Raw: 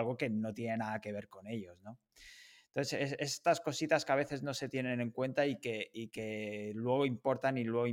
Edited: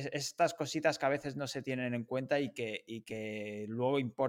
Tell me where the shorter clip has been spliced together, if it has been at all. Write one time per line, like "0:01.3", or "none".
none

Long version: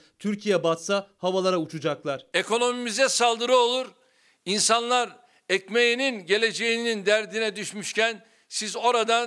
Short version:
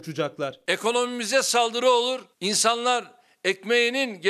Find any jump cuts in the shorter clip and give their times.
0:02.3

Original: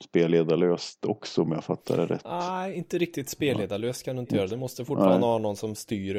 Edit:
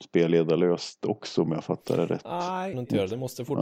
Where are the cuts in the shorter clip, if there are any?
0:02.7

